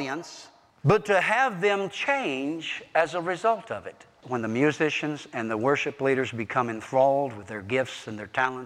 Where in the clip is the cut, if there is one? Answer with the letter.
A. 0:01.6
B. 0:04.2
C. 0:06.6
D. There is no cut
B